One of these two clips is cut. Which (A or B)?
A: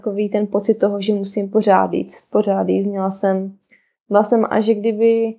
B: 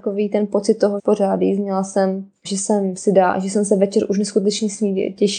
B